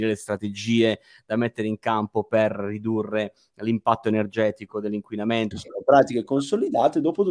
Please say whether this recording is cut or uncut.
cut